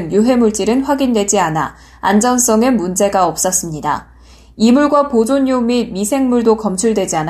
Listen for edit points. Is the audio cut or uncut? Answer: uncut